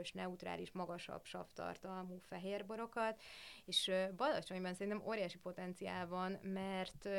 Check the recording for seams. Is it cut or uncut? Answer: uncut